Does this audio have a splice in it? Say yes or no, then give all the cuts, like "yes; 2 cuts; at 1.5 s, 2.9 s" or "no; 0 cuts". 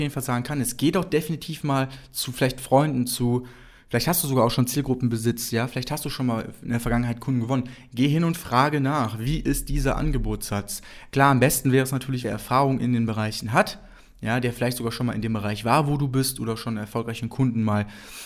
yes; 1 cut; at 12.2 s